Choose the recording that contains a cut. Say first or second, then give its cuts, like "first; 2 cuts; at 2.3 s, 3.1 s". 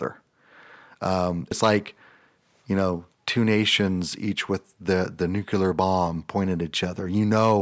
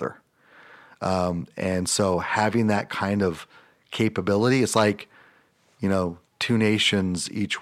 first; 1 cut; at 1.5 s